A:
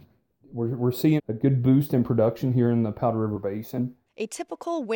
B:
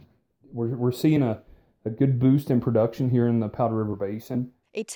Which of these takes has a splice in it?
A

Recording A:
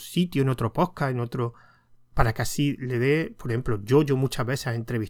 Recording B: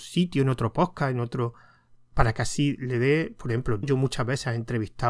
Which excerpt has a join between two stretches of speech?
B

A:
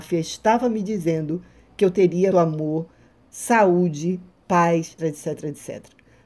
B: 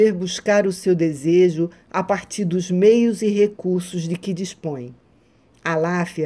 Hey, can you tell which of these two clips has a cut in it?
A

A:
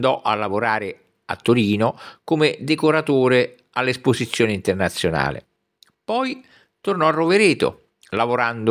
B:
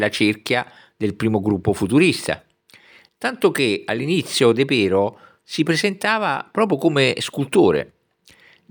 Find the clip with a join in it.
B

